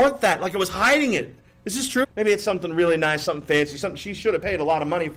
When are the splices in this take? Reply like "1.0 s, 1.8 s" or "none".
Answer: 2.0 s